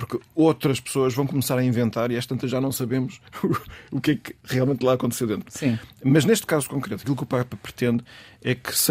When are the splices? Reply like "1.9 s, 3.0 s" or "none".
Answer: 5.5 s

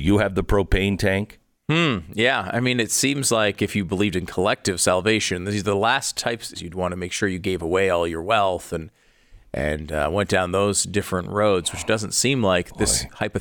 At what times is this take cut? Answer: 6.5 s

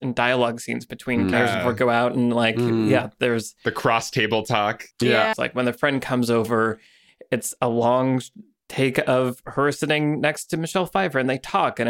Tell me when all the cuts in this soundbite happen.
1.3 s, 5.3 s

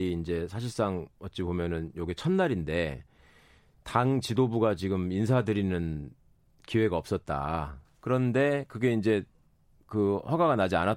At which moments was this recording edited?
7.8 s

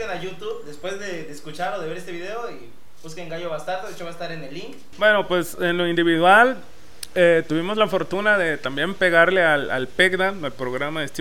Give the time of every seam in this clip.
4.9 s

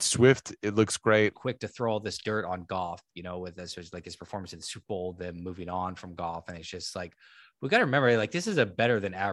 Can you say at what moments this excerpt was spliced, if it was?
1.3 s

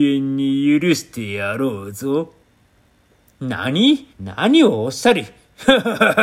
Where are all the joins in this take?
4.1 s

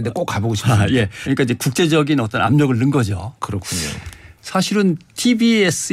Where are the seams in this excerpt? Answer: 1.2 s

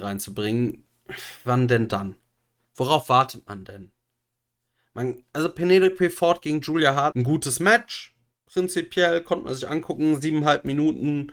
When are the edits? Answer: 7.1 s

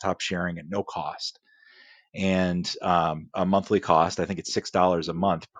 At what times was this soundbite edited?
3.3 s

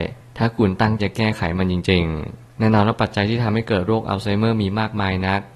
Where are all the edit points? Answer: 1.0 s

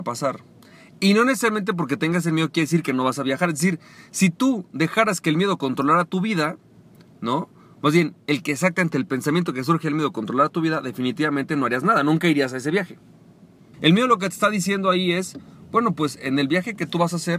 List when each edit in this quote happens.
13.7 s

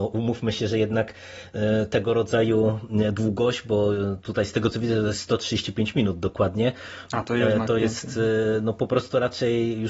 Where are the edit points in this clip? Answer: none

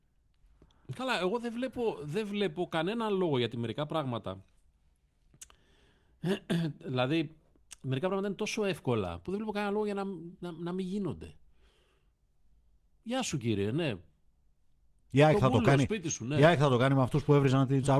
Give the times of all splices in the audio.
none

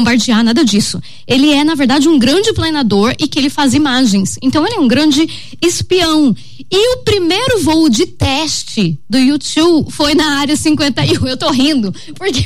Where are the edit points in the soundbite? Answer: none

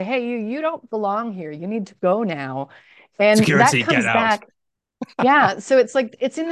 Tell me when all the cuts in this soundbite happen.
none

